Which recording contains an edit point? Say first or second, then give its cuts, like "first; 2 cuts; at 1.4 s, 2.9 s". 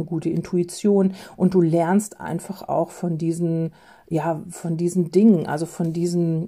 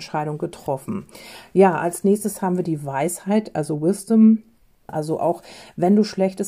second; 1 cut; at 4.9 s